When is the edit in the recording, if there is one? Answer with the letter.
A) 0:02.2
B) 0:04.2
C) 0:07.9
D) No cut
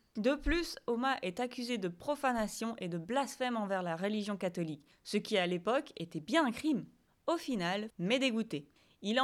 C